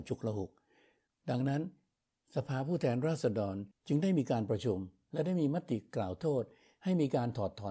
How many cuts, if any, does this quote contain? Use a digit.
0